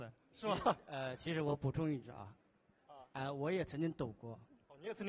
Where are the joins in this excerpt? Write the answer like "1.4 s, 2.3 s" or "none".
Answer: none